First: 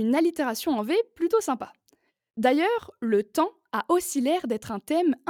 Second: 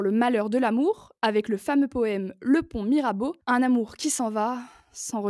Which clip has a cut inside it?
second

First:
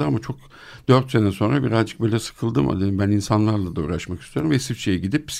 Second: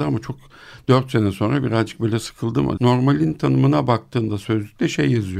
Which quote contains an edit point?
second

